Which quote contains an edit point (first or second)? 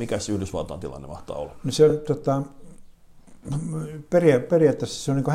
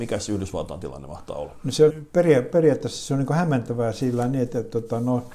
second